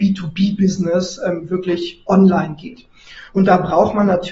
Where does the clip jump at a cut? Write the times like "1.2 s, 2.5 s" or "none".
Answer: 3.3 s